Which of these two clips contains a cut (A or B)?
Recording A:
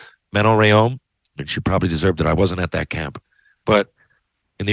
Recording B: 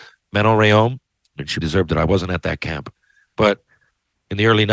B